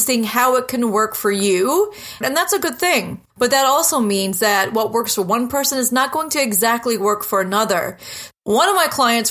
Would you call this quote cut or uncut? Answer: cut